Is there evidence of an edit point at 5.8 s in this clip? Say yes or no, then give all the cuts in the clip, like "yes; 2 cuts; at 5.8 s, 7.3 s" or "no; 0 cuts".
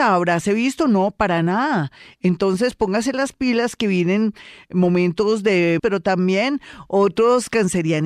yes; 1 cut; at 5.8 s